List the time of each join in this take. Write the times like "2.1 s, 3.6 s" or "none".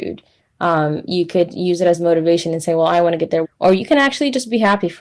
3.4 s